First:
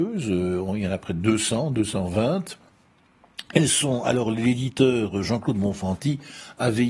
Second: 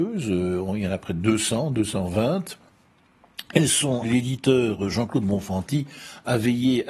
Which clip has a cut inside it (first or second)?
second